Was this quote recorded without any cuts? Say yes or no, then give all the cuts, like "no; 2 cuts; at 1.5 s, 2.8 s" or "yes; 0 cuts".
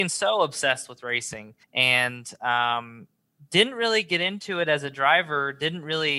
no; 1 cut; at 1.6 s